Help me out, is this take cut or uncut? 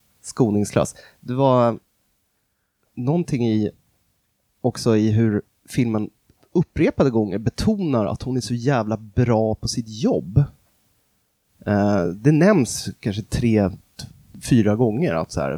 uncut